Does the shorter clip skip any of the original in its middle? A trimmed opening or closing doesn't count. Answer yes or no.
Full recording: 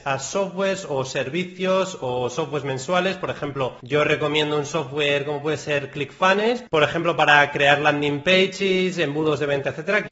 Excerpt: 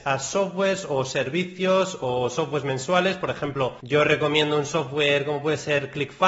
no